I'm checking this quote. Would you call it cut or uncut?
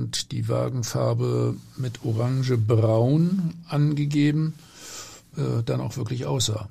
cut